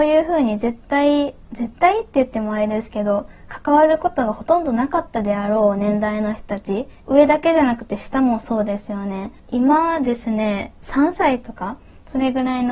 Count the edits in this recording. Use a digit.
2